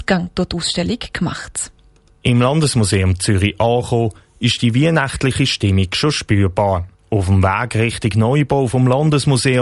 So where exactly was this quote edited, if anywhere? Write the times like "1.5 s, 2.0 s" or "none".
none